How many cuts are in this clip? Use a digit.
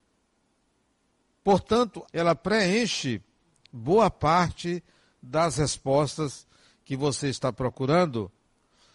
1